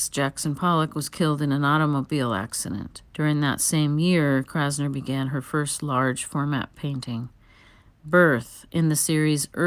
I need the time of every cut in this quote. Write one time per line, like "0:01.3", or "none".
0:03.1